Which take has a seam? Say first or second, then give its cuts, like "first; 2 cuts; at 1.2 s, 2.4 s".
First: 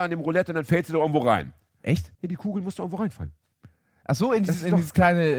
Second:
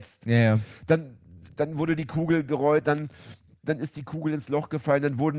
first; 1 cut; at 2.1 s